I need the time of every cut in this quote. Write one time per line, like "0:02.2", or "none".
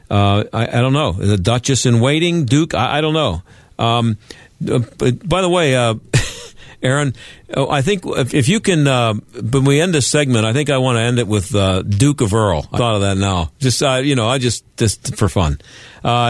0:12.8